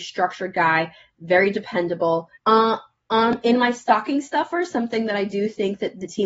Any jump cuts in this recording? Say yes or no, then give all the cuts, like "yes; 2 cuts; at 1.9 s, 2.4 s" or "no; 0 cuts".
yes; 1 cut; at 2.4 s